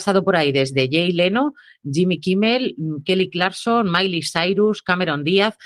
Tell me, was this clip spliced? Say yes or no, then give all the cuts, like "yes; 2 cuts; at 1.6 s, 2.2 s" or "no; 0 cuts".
no; 0 cuts